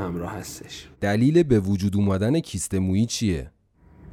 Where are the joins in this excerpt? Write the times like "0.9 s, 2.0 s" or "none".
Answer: 0.9 s